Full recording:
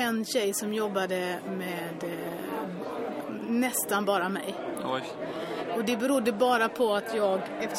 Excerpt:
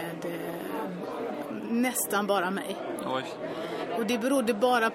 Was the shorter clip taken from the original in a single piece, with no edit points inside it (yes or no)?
yes